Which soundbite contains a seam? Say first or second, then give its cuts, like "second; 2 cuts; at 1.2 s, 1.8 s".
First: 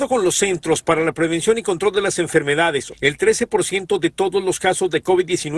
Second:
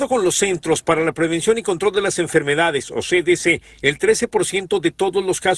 first; 1 cut; at 2.9 s